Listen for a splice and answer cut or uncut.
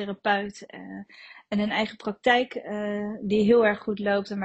uncut